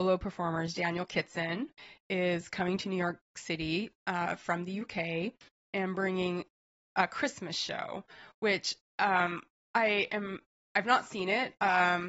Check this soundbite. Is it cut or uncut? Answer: uncut